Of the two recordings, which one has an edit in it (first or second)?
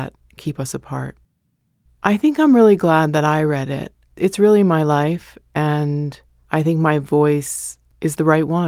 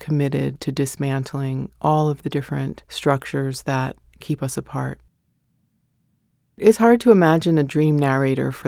first